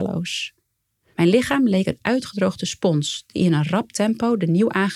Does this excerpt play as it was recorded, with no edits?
no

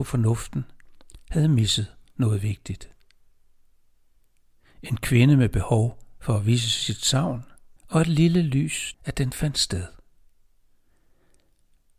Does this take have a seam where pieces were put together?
yes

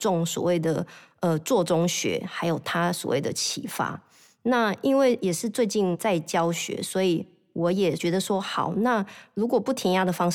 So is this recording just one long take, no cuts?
yes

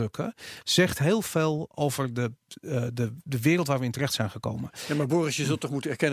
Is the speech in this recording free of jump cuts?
yes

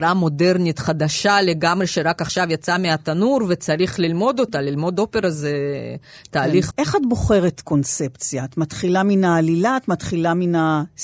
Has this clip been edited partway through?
yes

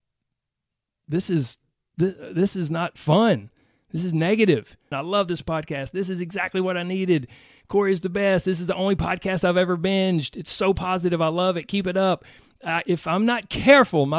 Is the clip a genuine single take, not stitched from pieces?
no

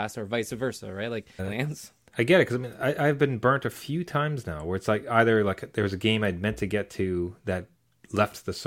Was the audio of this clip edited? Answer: yes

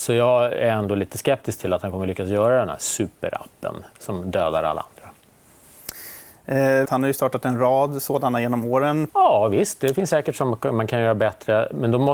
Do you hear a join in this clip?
yes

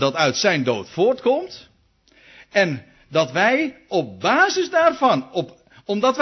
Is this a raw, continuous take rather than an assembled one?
yes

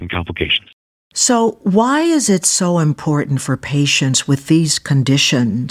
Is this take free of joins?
yes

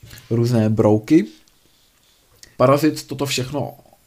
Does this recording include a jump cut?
yes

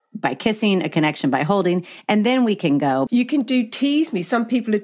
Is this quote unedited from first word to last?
no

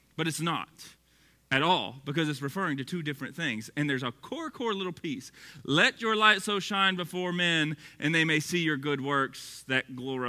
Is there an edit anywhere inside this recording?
no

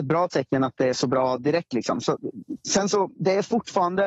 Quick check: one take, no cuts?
yes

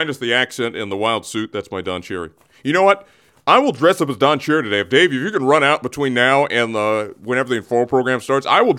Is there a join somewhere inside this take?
no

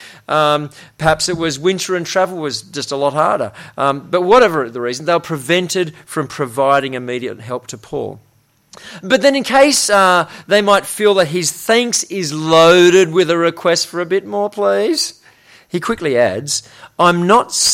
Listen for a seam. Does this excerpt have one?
no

